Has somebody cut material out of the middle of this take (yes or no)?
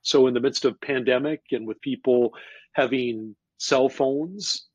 no